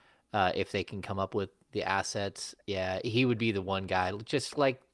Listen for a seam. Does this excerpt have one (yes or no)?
no